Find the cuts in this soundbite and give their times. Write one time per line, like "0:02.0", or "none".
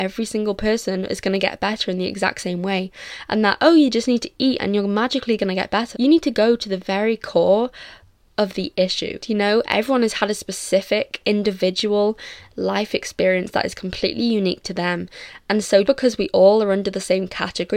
0:05.9
0:09.2
0:15.8